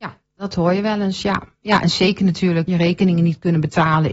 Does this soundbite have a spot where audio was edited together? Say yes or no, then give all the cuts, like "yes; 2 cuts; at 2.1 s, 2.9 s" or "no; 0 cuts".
yes; 1 cut; at 2.7 s